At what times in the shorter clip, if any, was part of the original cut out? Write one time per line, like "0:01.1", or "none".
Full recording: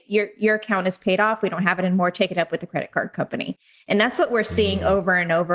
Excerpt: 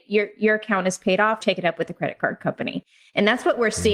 0:01.4